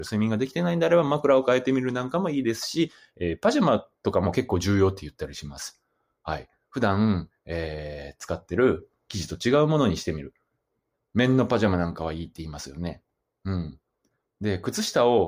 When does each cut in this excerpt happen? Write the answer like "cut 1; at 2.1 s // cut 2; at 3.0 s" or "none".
cut 1; at 3.9 s